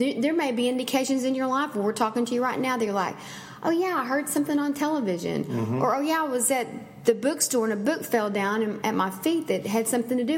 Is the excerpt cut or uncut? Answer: uncut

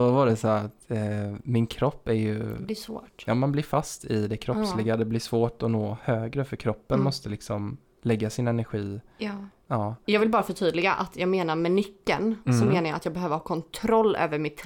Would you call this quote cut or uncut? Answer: uncut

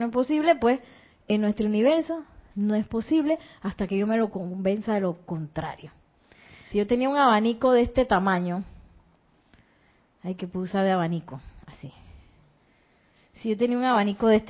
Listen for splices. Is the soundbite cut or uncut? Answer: cut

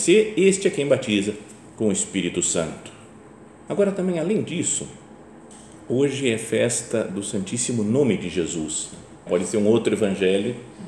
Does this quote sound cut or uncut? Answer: cut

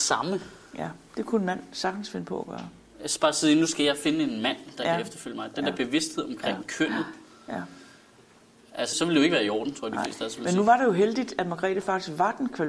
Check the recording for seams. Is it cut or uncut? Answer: cut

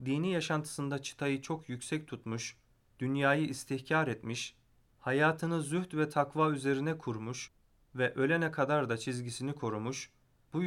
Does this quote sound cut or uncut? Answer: uncut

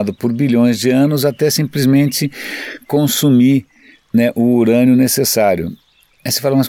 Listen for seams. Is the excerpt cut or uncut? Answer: uncut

